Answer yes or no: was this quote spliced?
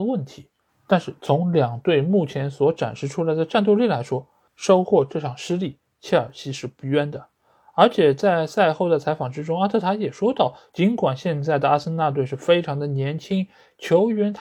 no